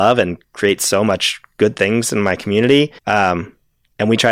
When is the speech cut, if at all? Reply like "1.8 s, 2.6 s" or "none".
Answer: 3.0 s